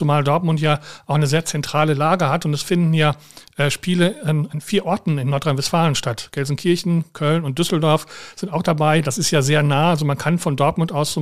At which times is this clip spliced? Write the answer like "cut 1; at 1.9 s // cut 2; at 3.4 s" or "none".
none